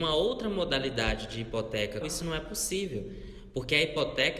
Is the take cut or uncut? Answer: cut